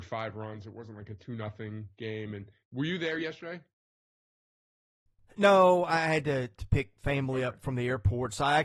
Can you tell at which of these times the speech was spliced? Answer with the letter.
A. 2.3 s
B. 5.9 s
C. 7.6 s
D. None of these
D